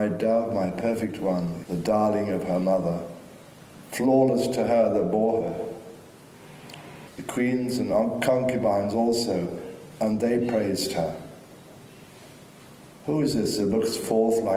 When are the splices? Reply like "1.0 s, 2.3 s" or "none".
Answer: 1.6 s, 7.1 s